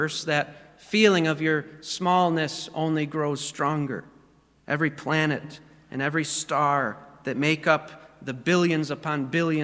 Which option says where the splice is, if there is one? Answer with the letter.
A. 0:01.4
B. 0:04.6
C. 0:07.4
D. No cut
B